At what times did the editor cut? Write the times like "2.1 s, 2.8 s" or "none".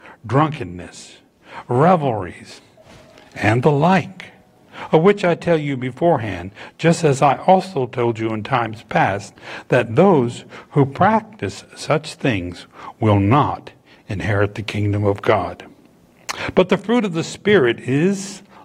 none